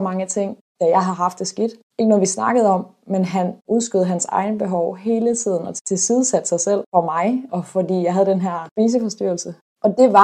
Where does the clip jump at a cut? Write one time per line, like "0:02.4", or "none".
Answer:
0:07.5